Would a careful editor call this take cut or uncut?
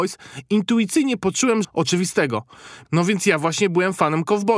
cut